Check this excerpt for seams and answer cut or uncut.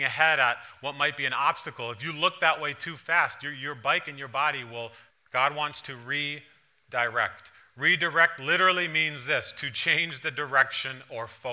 cut